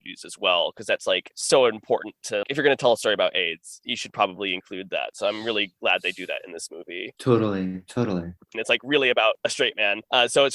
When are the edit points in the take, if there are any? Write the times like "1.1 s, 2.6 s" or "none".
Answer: 2.4 s, 8.5 s